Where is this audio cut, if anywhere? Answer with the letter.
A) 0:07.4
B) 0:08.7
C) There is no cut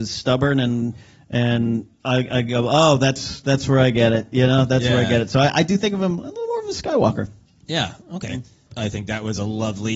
B